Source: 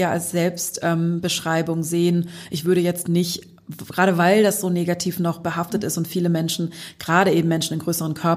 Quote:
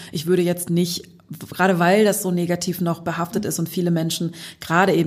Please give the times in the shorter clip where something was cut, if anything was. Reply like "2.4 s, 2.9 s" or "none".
none